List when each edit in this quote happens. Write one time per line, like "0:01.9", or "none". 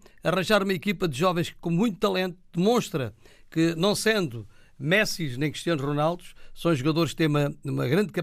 none